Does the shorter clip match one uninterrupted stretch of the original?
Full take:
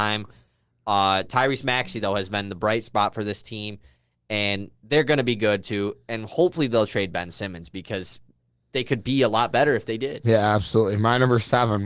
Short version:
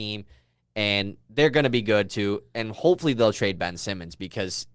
yes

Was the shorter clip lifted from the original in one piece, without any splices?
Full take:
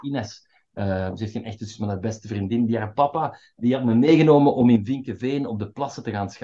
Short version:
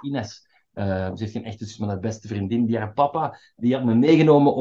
yes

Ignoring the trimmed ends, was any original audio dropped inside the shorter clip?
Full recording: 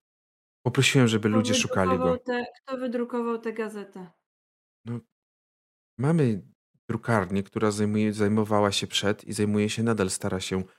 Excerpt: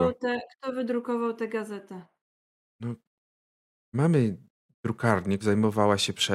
yes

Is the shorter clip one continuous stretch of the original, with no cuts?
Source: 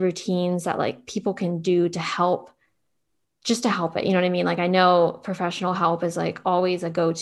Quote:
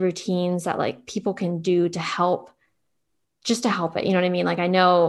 yes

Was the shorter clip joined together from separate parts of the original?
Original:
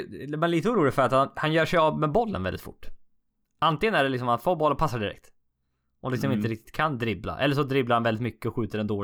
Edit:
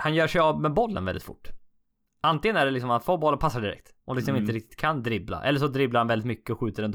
yes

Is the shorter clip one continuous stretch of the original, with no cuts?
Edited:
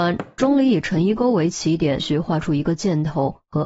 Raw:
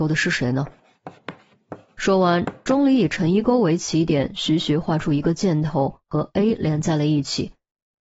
no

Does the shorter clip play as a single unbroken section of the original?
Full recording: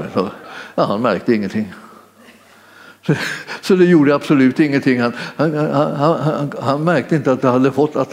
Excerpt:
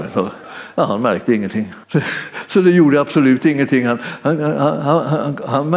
no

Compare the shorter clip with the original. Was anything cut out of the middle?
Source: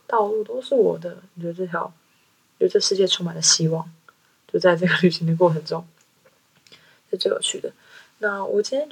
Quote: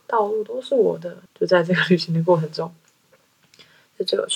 yes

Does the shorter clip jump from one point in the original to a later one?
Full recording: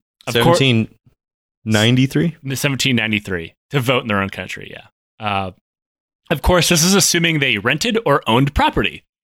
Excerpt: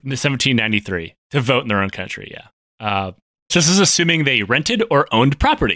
yes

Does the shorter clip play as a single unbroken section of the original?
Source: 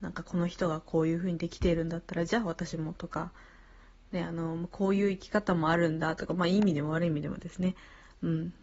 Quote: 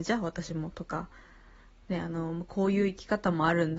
yes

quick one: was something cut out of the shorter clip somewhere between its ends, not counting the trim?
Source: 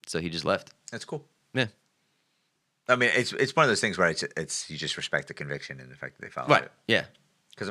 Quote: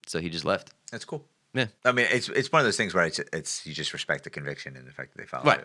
yes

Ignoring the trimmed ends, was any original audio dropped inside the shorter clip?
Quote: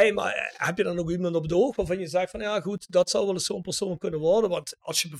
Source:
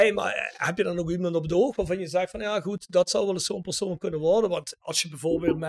no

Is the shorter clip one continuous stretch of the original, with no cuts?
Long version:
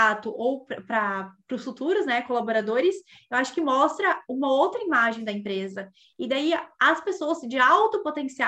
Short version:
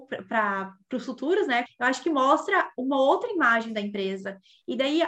no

